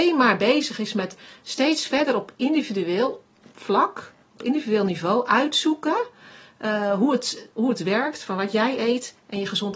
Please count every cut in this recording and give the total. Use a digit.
0